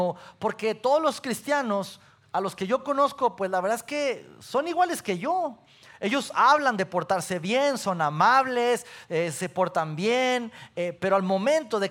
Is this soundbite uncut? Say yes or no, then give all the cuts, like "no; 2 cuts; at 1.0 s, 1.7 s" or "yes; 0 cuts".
yes; 0 cuts